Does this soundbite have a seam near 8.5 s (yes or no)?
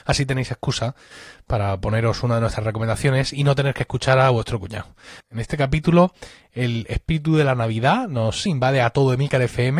yes